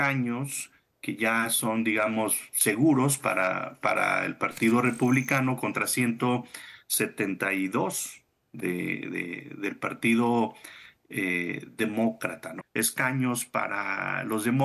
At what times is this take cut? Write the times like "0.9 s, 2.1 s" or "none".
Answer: 12.6 s